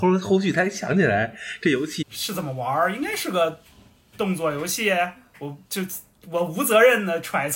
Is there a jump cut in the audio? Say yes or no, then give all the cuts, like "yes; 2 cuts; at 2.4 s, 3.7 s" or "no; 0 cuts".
yes; 2 cuts; at 2.0 s, 5.6 s